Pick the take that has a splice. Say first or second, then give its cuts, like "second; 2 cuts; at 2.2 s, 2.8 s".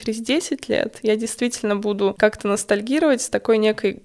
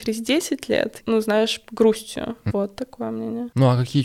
second; 2 cuts; at 1.0 s, 2.5 s